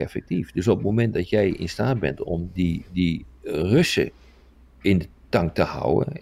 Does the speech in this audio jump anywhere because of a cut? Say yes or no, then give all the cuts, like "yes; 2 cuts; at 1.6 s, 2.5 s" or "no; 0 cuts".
no; 0 cuts